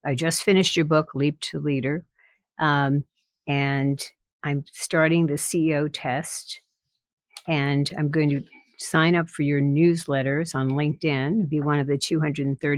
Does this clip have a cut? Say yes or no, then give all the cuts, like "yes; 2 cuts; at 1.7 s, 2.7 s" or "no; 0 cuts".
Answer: no; 0 cuts